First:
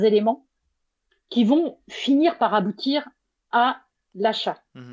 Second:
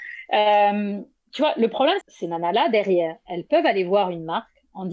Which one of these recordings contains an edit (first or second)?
second